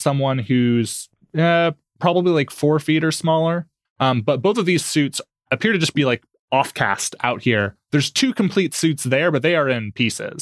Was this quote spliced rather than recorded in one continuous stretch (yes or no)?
yes